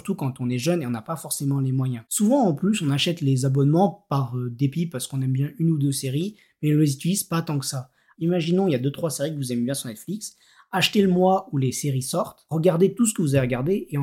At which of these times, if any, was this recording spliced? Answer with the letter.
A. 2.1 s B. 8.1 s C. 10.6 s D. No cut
B